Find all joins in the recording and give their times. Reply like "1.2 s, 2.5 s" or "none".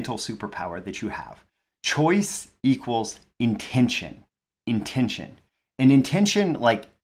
none